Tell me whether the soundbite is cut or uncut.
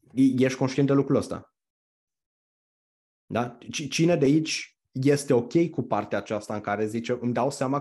uncut